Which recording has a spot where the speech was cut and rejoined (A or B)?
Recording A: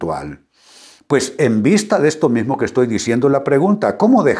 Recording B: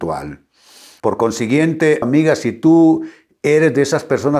B